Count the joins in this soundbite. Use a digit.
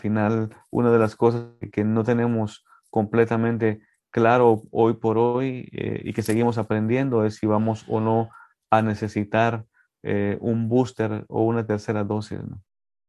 1